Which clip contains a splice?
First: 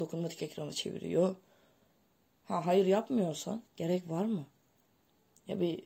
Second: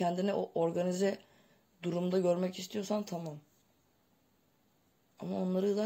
first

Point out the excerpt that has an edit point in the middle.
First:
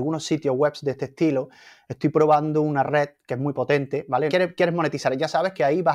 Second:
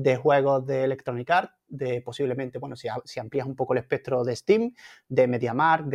first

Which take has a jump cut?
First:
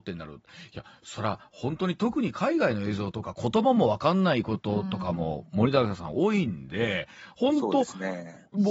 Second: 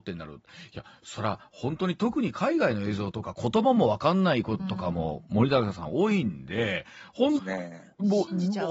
second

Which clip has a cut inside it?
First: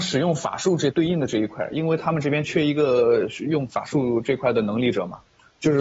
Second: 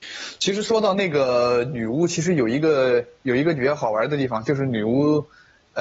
first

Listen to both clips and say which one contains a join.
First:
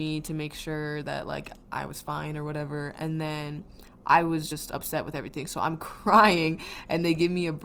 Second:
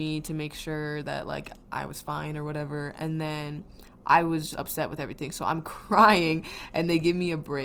second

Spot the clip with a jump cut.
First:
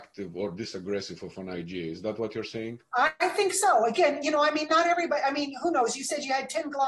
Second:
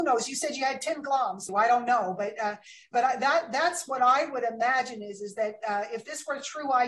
second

